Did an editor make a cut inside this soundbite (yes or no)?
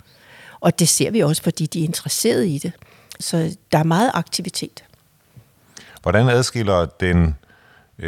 yes